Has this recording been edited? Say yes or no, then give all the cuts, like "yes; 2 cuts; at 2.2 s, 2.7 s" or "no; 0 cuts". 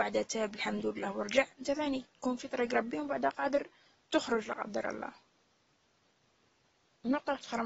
no; 0 cuts